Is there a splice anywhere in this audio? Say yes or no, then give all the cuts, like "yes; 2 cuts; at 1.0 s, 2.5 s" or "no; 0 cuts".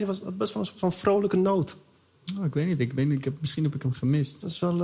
no; 0 cuts